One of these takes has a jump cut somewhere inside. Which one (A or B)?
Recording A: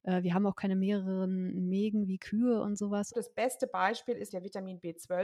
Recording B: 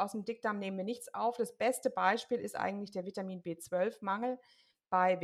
A